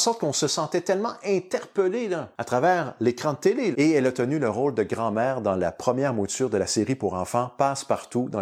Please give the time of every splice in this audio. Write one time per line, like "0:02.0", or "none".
0:03.7